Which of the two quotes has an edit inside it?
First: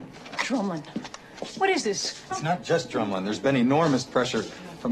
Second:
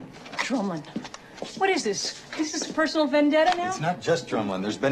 first; 1 cut; at 2.3 s

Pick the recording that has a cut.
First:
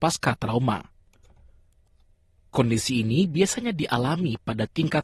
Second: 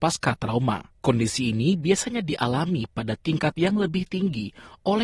second; 1 cut; at 1.0 s

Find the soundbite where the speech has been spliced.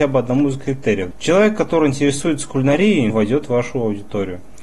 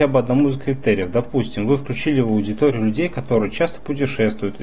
first; 2 cuts; at 1.1 s, 3.1 s

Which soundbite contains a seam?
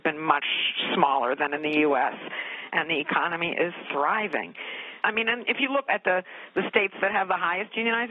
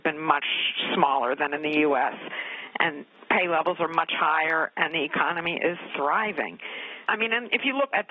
first; 1 cut; at 2.7 s

